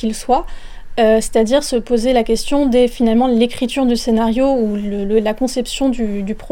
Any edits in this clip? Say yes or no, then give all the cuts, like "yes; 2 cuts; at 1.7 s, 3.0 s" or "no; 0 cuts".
no; 0 cuts